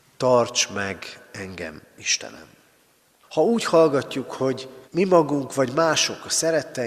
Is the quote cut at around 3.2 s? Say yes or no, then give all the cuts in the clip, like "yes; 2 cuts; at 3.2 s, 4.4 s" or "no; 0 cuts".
yes; 2 cuts; at 3.2 s, 4.8 s